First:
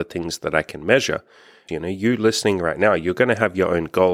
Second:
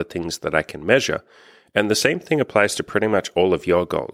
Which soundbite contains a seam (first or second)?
first